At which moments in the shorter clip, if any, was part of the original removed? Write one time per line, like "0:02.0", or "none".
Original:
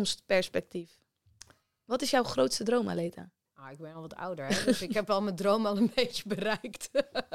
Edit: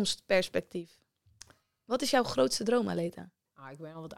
none

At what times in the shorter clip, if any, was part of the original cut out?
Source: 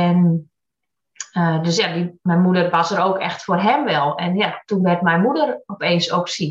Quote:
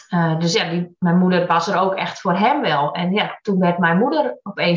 none

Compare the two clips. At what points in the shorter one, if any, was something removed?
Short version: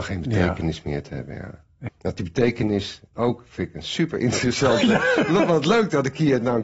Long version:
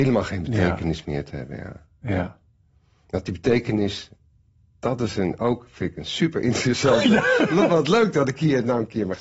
0:01.9
0:03.2

